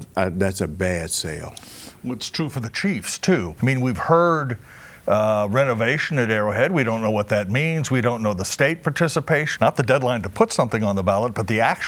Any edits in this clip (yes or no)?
yes